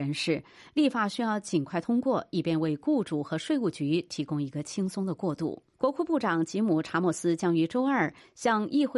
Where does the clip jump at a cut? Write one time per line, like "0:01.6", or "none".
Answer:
0:05.7